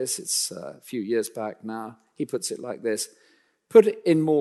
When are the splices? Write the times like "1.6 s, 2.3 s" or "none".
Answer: none